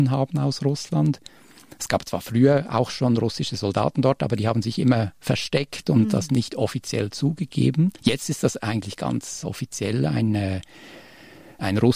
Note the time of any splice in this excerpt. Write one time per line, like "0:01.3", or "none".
0:08.0
0:09.4